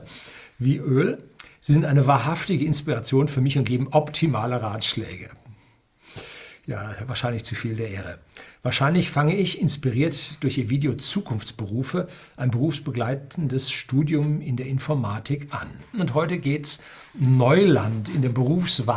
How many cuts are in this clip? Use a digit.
2